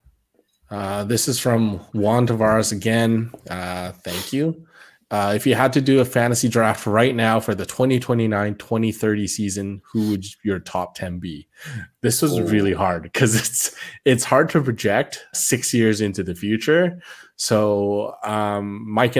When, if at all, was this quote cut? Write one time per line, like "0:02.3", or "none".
0:15.3